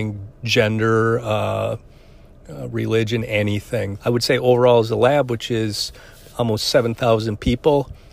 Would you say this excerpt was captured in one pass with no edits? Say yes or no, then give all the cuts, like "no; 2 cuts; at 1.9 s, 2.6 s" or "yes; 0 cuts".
no; 1 cut; at 4.0 s